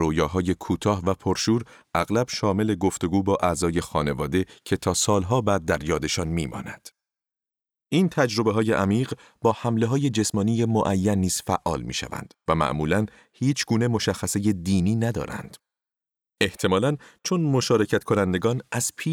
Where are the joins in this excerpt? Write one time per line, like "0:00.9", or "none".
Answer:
none